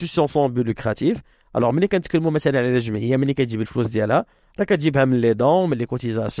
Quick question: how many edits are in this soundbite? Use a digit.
0